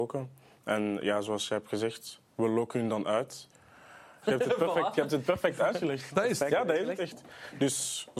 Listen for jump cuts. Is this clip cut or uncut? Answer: cut